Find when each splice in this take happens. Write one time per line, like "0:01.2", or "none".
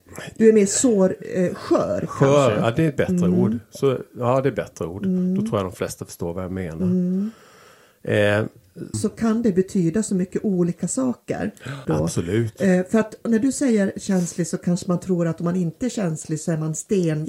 0:08.9
0:11.8